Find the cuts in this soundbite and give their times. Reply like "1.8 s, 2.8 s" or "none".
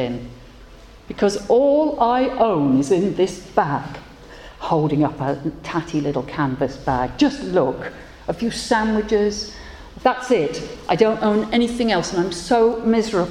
10.0 s